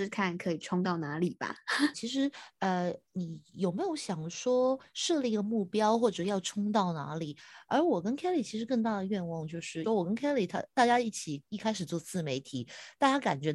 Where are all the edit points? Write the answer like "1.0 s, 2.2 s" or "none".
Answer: 1.9 s, 9.8 s